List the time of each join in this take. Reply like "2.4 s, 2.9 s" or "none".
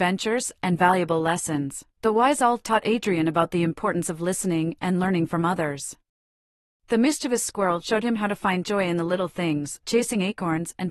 1.9 s, 9.8 s